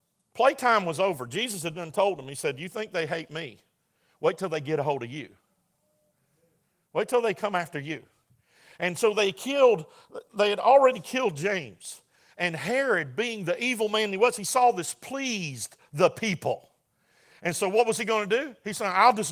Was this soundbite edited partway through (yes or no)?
no